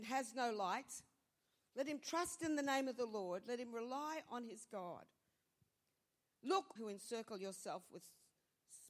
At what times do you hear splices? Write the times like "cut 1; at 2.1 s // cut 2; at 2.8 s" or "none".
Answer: cut 1; at 6.8 s